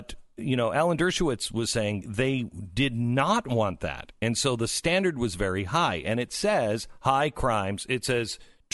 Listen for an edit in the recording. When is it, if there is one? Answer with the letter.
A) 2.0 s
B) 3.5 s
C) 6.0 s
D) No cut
A